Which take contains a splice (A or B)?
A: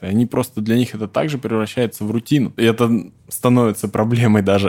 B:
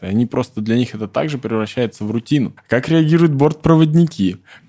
B